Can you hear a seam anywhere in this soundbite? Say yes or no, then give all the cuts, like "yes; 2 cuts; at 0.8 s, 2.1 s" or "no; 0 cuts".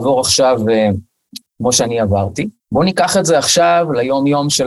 yes; 2 cuts; at 1.4 s, 2.6 s